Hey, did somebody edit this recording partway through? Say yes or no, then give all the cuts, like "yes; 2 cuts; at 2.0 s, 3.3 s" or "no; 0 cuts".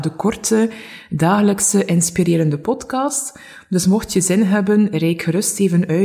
no; 0 cuts